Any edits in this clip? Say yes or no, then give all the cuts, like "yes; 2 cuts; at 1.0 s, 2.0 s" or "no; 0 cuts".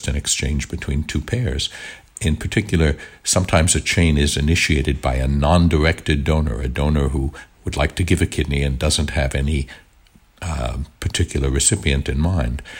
no; 0 cuts